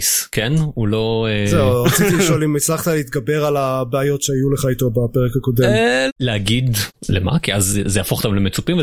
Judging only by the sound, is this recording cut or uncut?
cut